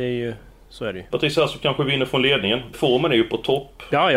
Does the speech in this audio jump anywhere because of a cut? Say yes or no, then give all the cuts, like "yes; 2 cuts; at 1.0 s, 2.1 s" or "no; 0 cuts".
yes; 2 cuts; at 1.1 s, 2.7 s